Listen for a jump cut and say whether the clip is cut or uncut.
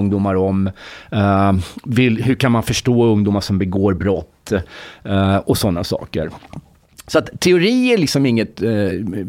uncut